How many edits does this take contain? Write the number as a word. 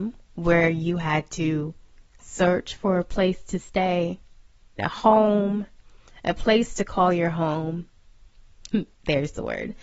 two